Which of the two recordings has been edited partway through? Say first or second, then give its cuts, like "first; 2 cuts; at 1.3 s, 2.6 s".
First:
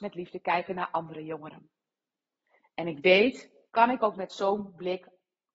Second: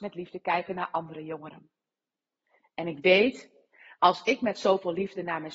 first; 1 cut; at 3.7 s